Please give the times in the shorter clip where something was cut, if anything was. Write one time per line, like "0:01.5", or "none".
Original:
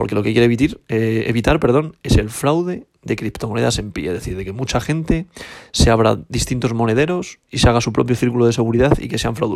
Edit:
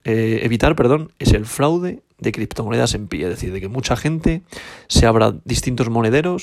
none

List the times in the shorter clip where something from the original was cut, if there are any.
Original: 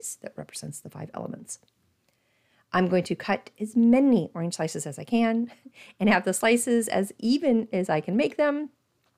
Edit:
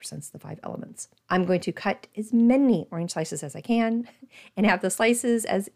0:01.2

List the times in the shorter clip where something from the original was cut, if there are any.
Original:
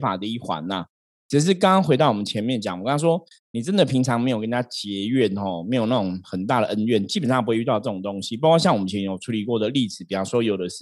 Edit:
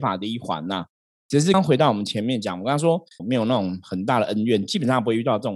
0:01.5
0:03.2

